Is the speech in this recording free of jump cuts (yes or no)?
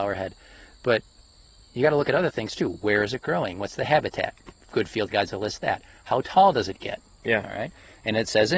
yes